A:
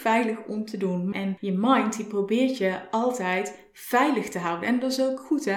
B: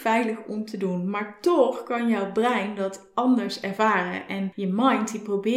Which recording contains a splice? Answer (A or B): A